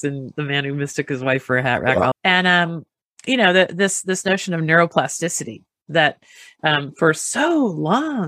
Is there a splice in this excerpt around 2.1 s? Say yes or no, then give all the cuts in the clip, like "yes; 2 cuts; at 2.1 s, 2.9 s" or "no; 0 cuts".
yes; 1 cut; at 2.1 s